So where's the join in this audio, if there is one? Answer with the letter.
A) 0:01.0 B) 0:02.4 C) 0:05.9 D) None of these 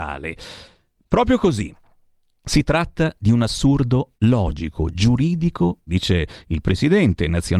C